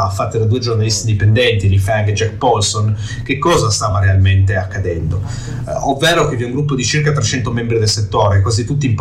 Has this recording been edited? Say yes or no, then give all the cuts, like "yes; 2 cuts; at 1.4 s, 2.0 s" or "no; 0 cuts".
no; 0 cuts